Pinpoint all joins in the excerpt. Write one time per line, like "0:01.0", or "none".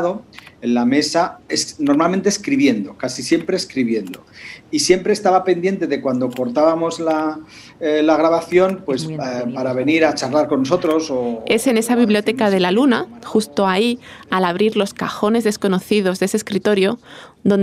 none